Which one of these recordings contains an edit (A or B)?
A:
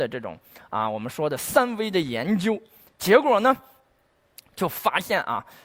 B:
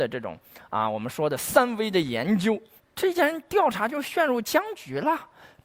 B